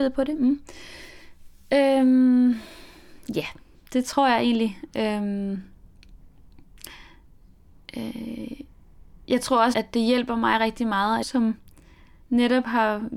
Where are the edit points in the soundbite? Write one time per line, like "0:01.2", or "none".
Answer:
0:09.7
0:11.2